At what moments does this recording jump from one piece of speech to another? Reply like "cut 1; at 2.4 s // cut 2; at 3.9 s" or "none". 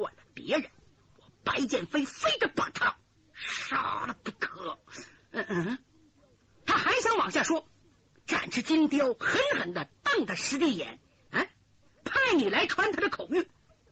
cut 1; at 11.3 s